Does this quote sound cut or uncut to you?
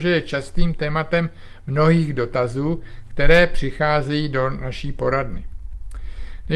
uncut